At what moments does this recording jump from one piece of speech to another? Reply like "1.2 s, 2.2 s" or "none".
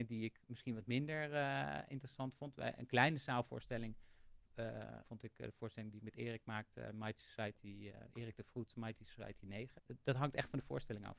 5.0 s, 9.8 s